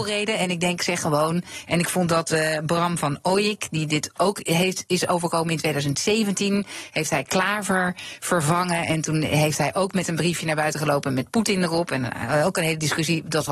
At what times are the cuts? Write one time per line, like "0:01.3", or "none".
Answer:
none